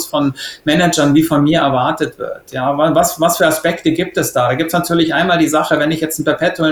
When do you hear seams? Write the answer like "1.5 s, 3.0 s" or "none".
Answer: none

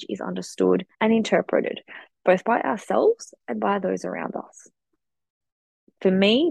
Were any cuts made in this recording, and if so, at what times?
0.9 s

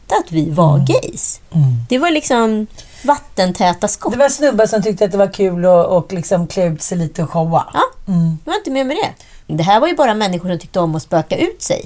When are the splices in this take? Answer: 9.5 s

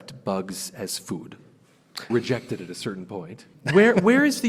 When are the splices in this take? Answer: 2.1 s, 3.5 s

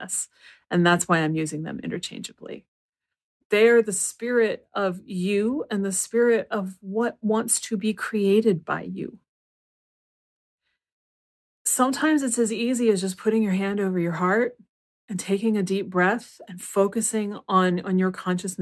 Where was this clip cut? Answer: none

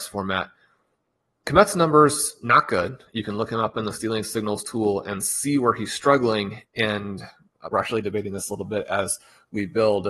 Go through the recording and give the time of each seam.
6.6 s, 7.7 s

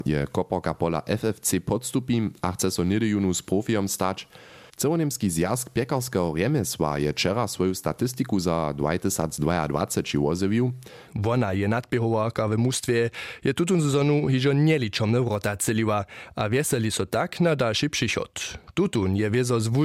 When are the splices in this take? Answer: 4.7 s, 11.1 s

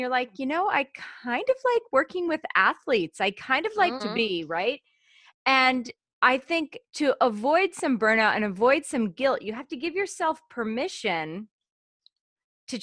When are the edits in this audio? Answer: 4.0 s, 6.9 s

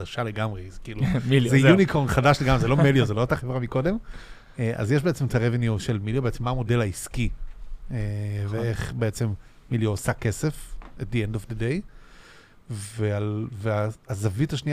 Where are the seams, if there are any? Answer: none

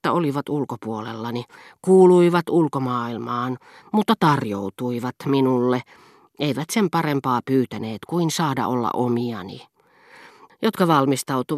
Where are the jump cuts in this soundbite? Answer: 10.5 s

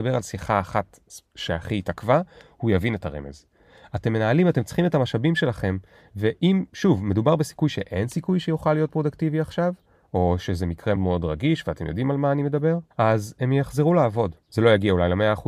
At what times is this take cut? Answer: 11.0 s, 12.9 s

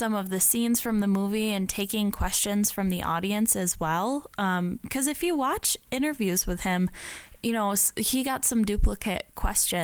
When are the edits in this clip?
none

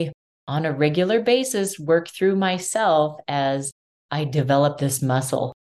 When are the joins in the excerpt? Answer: none

